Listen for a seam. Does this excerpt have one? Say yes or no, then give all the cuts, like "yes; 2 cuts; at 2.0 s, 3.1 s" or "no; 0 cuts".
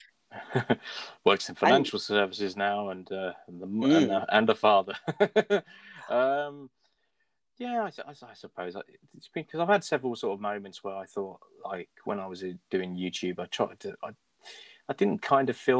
no; 0 cuts